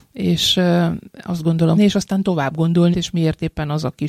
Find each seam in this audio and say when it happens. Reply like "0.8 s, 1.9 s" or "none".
1.8 s, 2.9 s

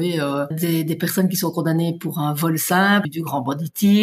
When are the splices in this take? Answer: none

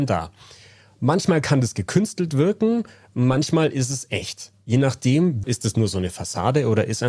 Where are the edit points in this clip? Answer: 5.4 s

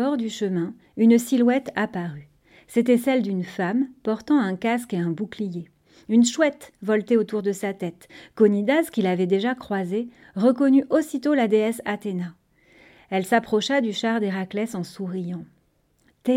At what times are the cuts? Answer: none

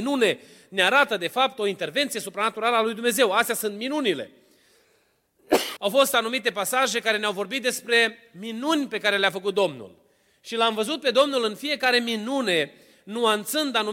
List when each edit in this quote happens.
5.8 s

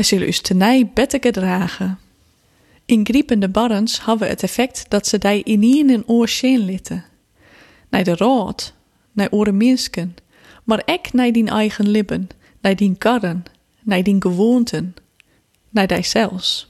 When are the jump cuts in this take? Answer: none

